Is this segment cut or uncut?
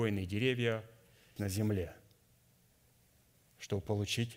cut